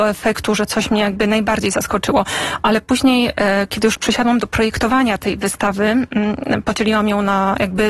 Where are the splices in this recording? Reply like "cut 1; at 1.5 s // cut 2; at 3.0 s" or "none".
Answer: none